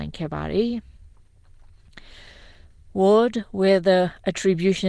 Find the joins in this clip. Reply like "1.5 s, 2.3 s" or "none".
none